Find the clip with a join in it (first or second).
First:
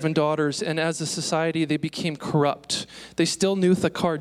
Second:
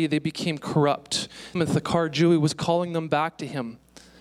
second